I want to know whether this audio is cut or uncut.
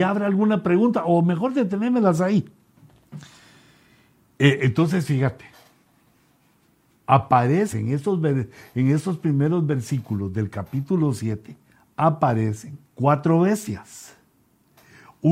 cut